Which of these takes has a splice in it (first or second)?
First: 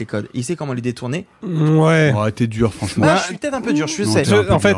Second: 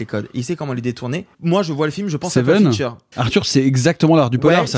second